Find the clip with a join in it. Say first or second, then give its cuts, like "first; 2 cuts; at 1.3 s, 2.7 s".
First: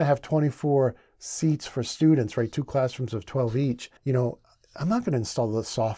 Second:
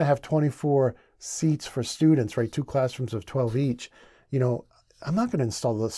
first; 1 cut; at 4.0 s